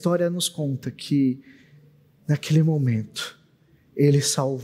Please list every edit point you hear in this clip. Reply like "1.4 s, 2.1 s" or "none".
none